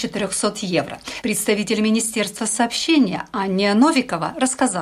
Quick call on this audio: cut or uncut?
cut